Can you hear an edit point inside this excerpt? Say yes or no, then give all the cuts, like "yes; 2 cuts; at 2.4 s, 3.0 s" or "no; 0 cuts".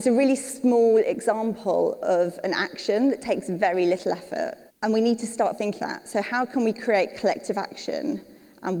yes; 2 cuts; at 4.7 s, 5.8 s